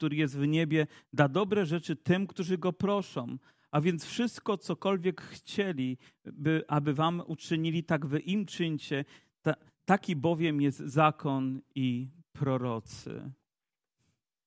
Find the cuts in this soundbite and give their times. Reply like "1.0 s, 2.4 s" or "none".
none